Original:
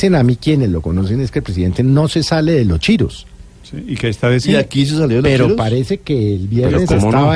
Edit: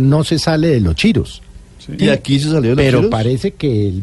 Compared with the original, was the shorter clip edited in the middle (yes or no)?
yes